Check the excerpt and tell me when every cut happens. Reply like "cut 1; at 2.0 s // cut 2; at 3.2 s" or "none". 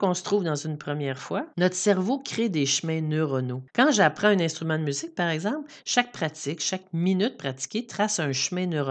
cut 1; at 1.5 s // cut 2; at 3.7 s